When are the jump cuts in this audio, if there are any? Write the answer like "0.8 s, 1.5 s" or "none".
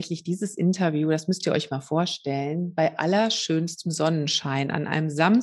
none